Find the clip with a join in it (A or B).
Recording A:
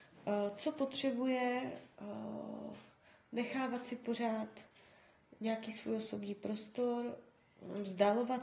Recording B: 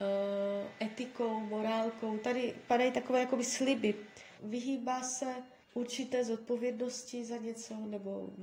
B